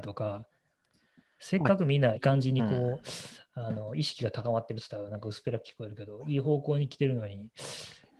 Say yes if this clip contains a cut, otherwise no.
yes